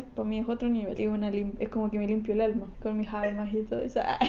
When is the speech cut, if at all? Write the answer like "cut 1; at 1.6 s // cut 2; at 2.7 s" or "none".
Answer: cut 1; at 1.0 s // cut 2; at 2.7 s